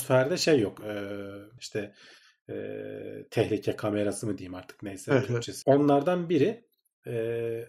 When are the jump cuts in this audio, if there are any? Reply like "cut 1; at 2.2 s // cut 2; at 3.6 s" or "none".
cut 1; at 1.6 s // cut 2; at 5.6 s